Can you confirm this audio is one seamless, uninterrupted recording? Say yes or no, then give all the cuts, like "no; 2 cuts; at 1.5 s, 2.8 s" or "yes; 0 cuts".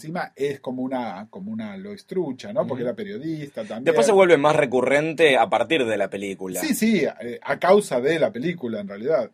yes; 0 cuts